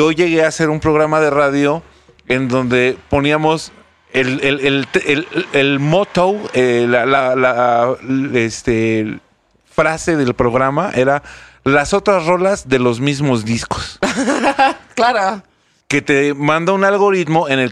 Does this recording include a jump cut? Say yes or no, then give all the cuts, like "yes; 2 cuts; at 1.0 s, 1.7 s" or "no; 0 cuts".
yes; 1 cut; at 15.8 s